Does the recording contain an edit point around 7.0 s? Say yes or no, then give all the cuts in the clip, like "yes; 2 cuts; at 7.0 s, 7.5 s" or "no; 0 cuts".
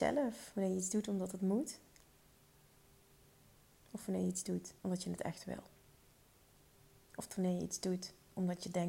no; 1 cut; at 4.8 s